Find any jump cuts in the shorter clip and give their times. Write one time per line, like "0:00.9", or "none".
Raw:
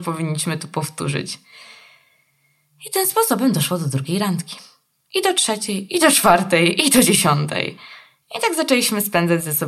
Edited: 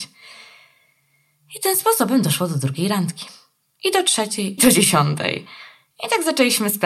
0:04.6